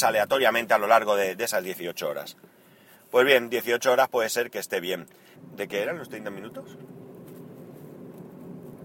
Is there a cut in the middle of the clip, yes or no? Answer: yes